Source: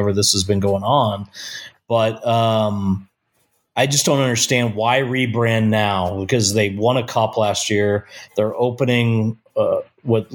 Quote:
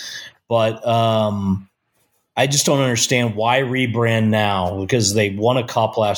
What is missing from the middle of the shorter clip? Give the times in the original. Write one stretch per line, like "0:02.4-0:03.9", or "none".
none